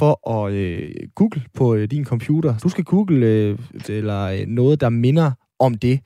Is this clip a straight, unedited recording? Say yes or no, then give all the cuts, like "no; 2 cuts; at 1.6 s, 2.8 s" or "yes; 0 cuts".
no; 2 cuts; at 2.6 s, 3.8 s